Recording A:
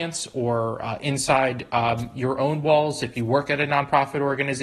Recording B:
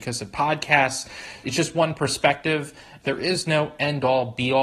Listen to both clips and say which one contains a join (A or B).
B